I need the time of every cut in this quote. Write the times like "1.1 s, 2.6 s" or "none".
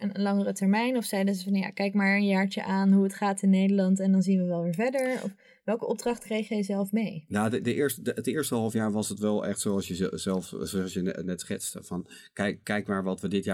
12.6 s

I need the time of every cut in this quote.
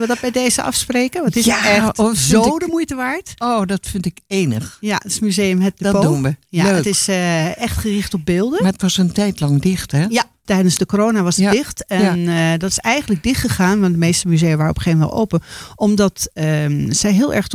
10.5 s

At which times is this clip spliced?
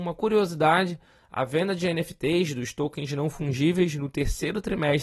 none

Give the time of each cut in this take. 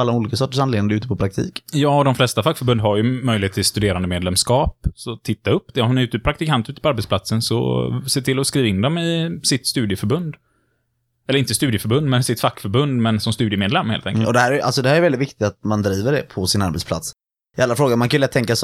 14.2 s

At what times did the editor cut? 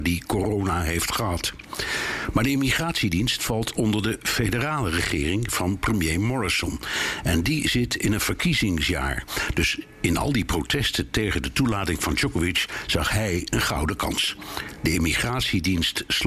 none

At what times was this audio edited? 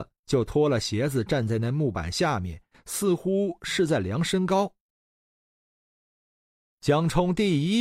none

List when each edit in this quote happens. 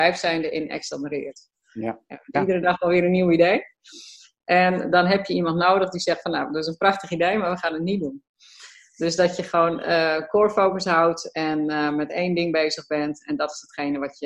2.3 s

